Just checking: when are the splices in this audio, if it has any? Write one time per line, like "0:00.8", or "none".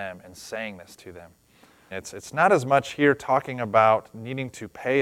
0:01.9